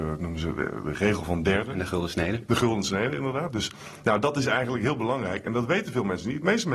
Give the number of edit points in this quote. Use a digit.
0